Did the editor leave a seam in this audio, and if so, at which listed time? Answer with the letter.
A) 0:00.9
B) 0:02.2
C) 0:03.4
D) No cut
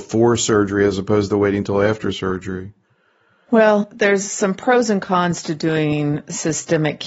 D